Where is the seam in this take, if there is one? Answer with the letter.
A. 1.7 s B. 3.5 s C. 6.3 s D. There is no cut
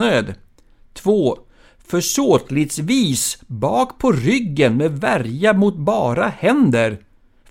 D